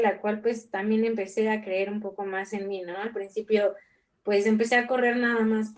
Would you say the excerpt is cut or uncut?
cut